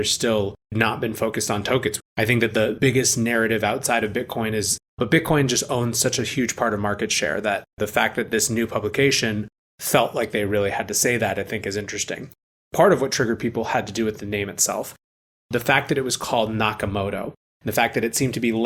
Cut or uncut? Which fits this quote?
cut